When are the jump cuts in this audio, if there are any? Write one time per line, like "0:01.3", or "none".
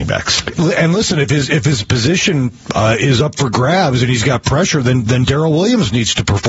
none